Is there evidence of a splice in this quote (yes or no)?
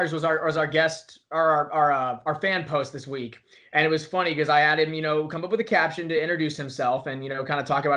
no